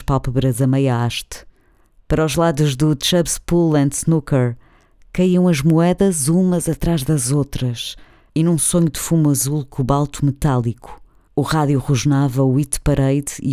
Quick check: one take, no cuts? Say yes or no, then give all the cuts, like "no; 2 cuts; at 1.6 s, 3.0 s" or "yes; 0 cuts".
yes; 0 cuts